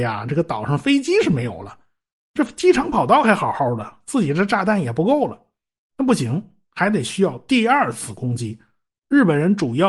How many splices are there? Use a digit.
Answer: 1